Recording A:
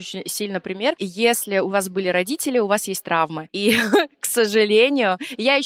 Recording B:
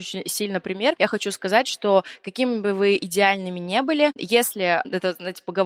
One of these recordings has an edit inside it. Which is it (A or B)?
A